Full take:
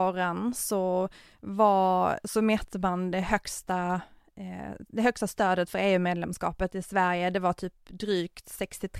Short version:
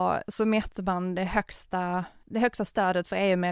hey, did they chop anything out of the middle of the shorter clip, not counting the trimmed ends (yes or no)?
yes